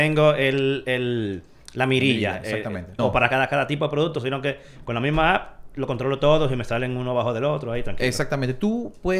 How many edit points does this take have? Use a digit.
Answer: 1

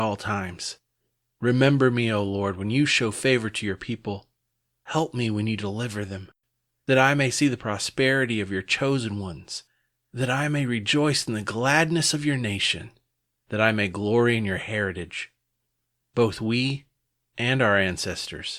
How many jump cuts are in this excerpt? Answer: 0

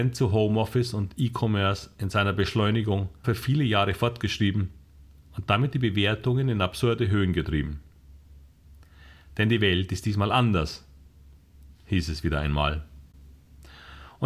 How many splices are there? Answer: 1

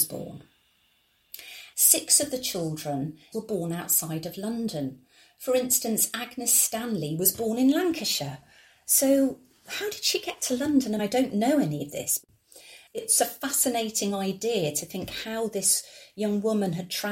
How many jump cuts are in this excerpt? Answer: 1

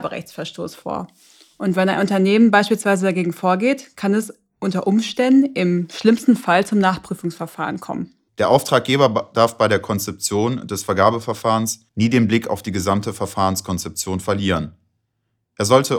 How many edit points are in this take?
2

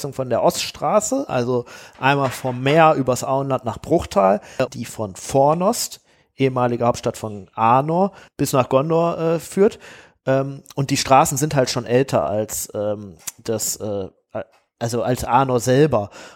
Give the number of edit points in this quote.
1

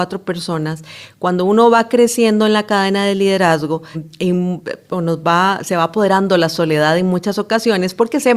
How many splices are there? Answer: 1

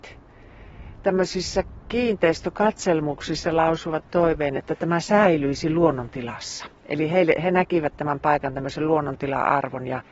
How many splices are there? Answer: 1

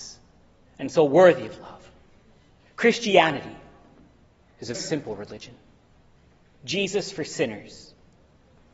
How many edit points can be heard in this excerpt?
1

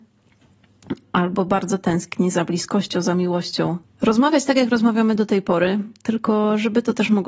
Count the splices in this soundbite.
1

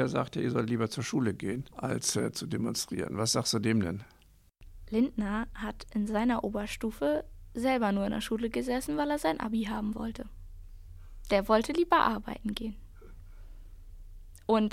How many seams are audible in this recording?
1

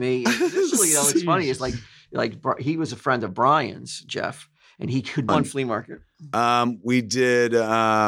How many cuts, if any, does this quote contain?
1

